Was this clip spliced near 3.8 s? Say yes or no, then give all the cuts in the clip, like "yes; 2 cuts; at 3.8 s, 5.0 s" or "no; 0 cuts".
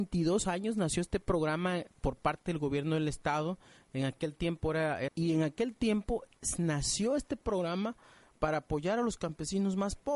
no; 1 cut; at 5.1 s